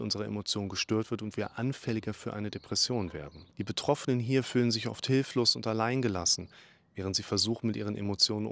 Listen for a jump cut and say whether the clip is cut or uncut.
cut